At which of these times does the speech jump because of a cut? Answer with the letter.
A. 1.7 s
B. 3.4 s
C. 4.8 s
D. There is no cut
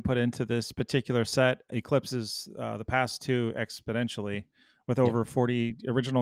A